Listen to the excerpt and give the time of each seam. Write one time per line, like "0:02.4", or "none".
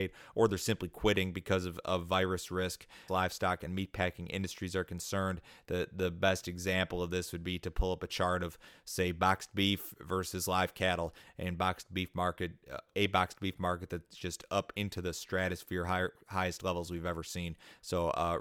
0:03.1
0:11.2
0:12.9